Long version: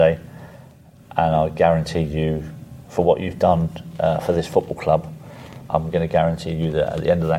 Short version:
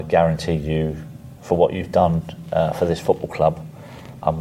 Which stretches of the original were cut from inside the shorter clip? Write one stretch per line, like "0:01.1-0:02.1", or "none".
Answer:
none